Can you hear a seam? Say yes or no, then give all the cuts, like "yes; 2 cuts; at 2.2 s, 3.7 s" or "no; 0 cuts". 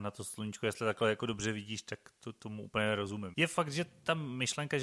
yes; 1 cut; at 3.3 s